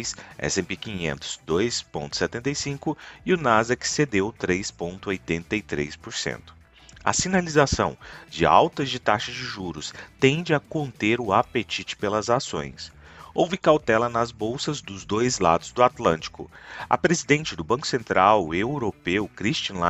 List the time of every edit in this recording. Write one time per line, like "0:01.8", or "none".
none